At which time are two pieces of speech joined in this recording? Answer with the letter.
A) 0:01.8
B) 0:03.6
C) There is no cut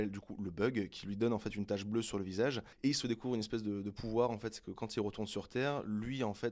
C